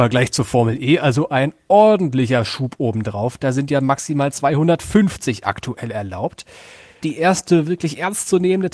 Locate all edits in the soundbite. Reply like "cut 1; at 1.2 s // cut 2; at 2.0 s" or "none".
cut 1; at 7.0 s